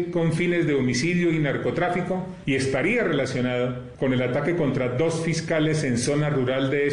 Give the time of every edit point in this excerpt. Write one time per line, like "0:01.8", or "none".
none